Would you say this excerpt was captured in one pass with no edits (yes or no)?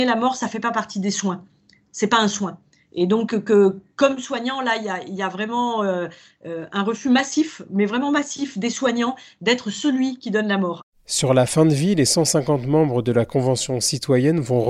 yes